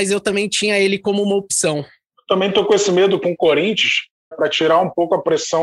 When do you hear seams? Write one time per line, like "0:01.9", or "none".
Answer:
0:04.3